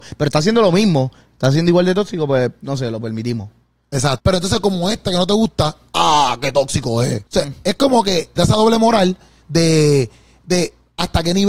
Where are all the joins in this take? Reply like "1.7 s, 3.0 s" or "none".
4.2 s, 7.3 s, 8.4 s